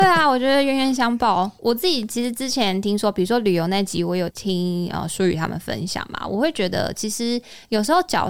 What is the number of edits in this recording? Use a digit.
1